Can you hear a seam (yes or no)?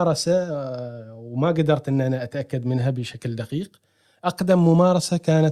no